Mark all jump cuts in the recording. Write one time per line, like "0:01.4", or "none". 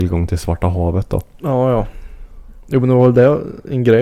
none